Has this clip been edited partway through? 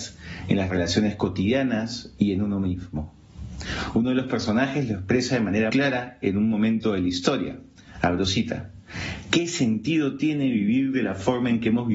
yes; 1 cut; at 5.7 s

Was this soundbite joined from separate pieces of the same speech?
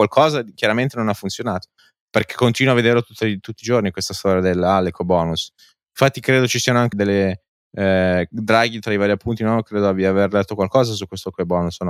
yes; 1 cut; at 6.9 s

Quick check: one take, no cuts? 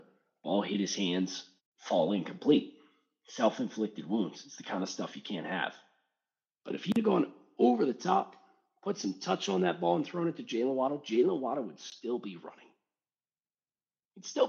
no; 2 cuts; at 1.6 s, 6.6 s

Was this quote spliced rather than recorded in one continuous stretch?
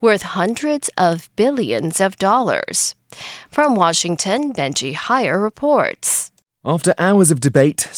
no; 0 cuts

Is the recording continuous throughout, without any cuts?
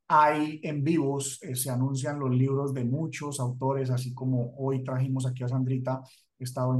yes; 0 cuts

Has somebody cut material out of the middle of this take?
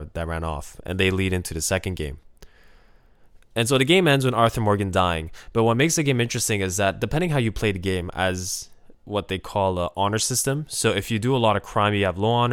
yes; 1 cut; at 8.9 s

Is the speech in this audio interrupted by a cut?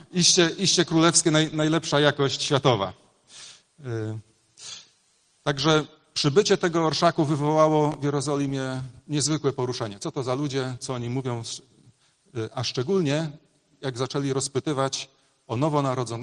no; 0 cuts

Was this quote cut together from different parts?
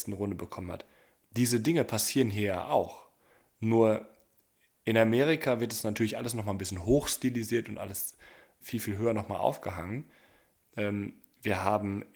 yes; 2 cuts; at 8.6 s, 10.6 s

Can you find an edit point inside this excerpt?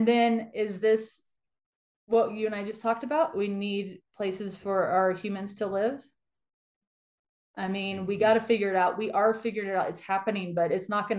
no; 0 cuts

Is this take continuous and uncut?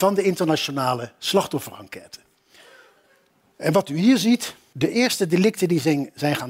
yes; 0 cuts

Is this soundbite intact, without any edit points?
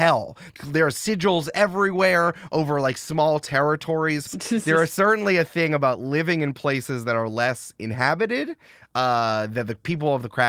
no; 1 cut; at 4.3 s

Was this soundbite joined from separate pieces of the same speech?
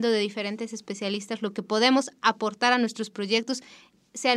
no; 0 cuts

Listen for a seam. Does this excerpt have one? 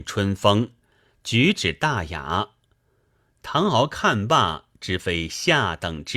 no; 0 cuts

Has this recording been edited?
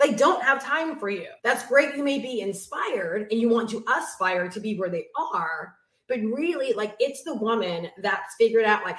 yes; 1 cut; at 1.4 s

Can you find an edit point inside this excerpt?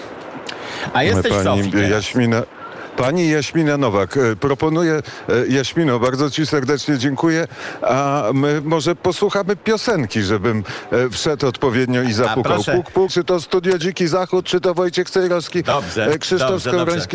yes; 1 cut; at 13.1 s

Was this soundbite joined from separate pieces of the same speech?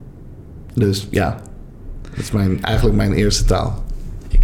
no; 0 cuts

